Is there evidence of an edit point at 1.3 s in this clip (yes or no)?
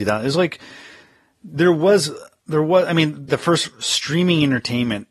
no